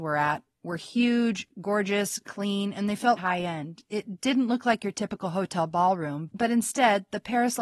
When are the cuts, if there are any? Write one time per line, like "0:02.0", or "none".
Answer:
0:03.2